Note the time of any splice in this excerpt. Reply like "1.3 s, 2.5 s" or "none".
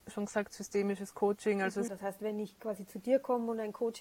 1.9 s